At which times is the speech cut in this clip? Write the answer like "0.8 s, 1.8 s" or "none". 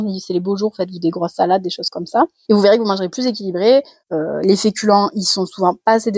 2.5 s, 4.0 s